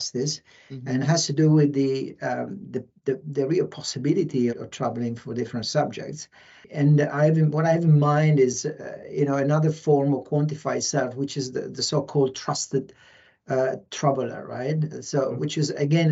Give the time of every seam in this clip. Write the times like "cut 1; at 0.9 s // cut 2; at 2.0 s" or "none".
cut 1; at 4.5 s